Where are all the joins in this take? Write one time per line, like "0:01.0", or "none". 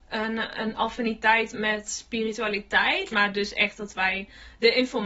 0:01.5
0:03.1